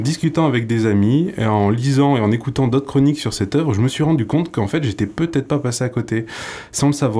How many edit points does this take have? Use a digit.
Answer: 0